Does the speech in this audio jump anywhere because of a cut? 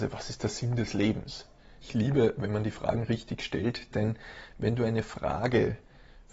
yes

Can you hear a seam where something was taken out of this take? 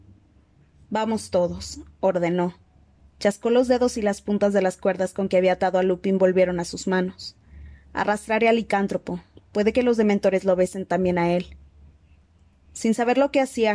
no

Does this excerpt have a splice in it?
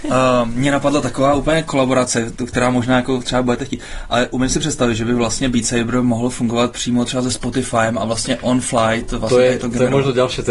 no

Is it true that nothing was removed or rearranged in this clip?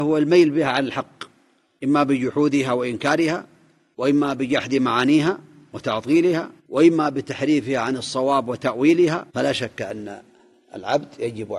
no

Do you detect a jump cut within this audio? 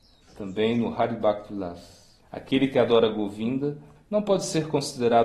yes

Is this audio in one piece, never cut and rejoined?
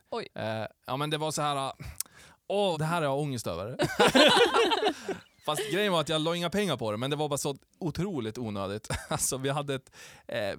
no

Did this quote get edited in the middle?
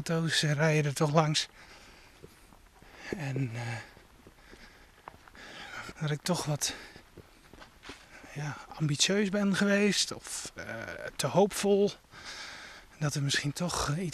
yes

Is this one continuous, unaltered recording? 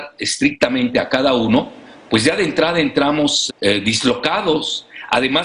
no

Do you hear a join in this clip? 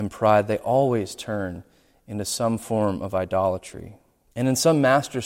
yes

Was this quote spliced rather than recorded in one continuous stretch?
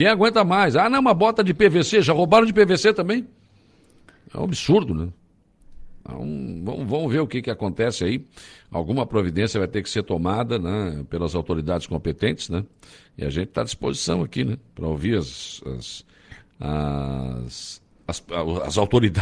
no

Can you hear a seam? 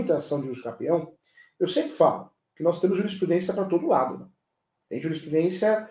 no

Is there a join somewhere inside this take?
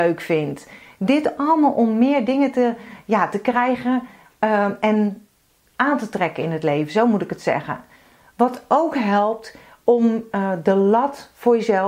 no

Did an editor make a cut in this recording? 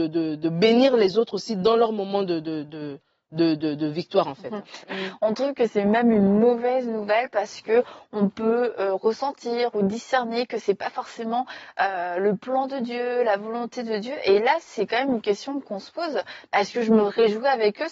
yes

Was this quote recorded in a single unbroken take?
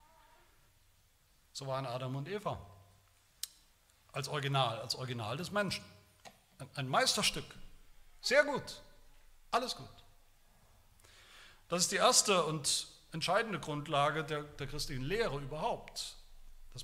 yes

